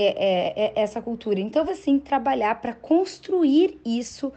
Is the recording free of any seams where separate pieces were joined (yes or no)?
no